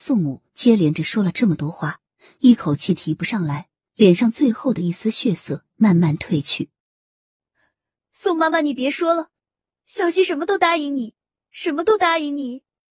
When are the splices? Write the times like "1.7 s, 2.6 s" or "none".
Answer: 3.8 s